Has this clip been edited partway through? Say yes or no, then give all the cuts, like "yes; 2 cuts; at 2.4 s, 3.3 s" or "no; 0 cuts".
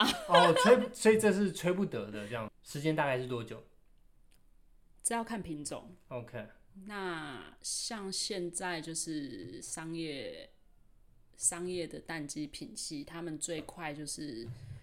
yes; 1 cut; at 2.5 s